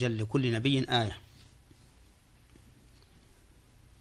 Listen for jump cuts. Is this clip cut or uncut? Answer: uncut